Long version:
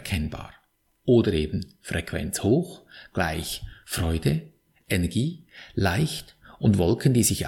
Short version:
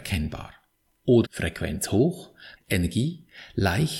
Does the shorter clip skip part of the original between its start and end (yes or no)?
yes